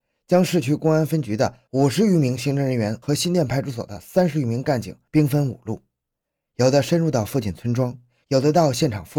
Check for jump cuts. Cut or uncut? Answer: uncut